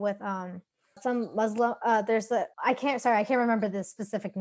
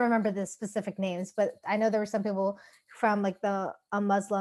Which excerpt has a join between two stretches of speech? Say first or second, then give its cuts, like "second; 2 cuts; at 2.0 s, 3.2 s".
first; 2 cuts; at 1.0 s, 2.5 s